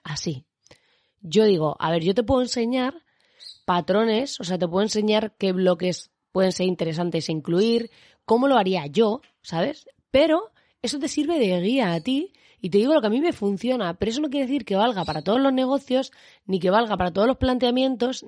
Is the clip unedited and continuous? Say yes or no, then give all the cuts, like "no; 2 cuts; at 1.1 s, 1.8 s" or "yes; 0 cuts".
yes; 0 cuts